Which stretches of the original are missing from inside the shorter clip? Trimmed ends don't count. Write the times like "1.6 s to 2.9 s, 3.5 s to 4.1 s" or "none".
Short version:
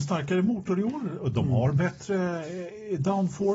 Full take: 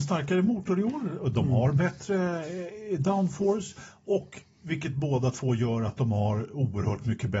none